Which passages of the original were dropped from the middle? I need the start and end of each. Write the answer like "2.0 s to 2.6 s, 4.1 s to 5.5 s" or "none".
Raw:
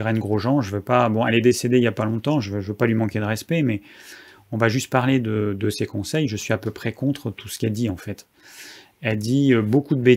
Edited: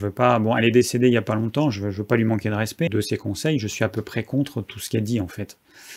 3.6 s to 5.6 s